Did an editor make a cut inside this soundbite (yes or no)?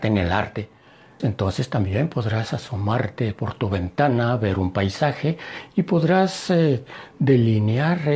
yes